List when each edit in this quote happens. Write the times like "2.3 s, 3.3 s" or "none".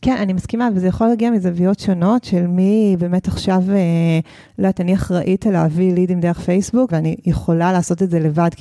6.9 s